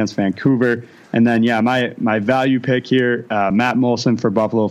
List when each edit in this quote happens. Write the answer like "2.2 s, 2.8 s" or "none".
none